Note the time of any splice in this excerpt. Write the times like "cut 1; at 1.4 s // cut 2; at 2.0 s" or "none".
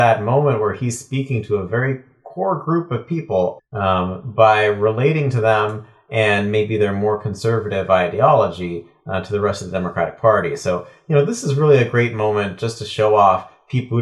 cut 1; at 3.6 s